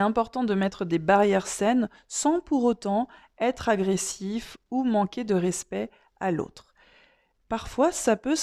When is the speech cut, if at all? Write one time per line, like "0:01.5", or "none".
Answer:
none